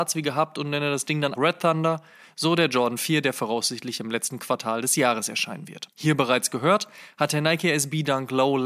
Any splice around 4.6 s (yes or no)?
no